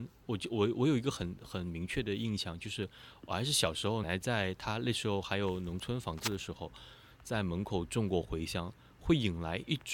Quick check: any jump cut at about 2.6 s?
no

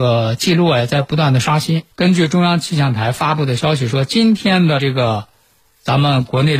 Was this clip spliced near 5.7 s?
no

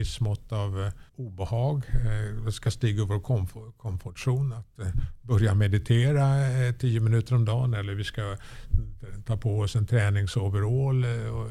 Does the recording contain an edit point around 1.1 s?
yes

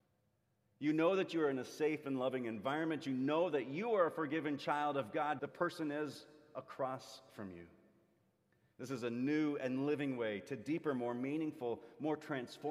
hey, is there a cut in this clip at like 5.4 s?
yes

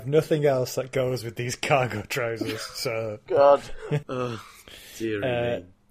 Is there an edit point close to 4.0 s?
yes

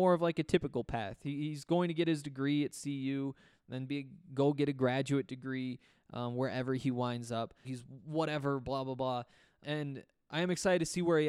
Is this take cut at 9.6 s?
yes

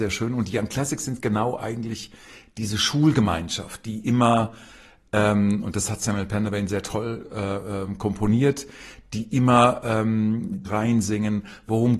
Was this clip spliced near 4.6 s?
no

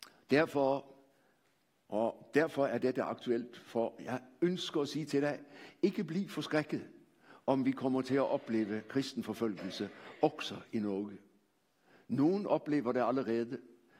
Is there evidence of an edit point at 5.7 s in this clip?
no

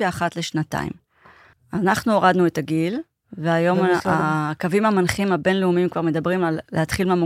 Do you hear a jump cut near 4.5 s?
no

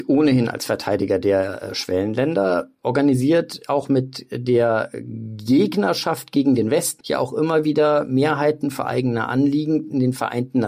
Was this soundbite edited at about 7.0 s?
yes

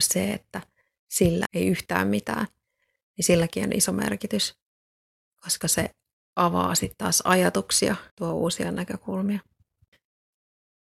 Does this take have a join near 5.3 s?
no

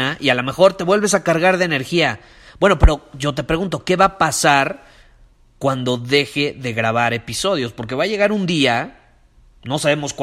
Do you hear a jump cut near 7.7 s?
no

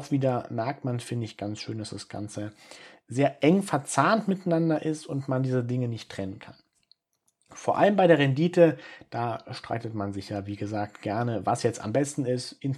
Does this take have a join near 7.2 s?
no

